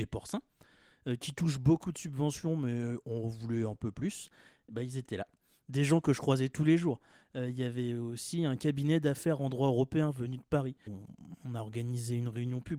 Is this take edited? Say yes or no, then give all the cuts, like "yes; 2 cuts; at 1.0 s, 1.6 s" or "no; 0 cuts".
yes; 1 cut; at 10.9 s